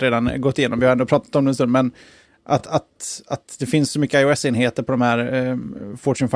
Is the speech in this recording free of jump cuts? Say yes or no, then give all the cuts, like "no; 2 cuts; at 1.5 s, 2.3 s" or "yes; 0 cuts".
yes; 0 cuts